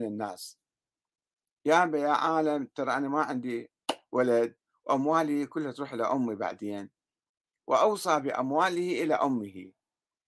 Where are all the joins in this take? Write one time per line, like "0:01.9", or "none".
none

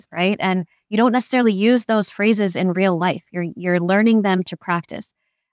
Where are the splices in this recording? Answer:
none

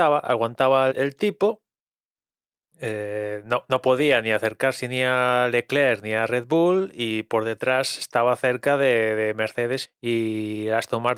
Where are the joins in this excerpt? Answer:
0:00.9
0:09.8

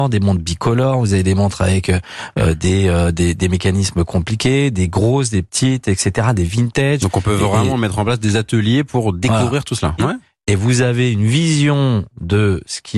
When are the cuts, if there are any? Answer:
0:10.0

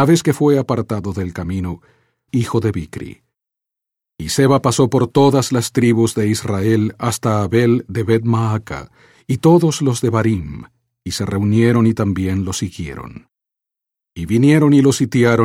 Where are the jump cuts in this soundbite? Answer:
0:02.3

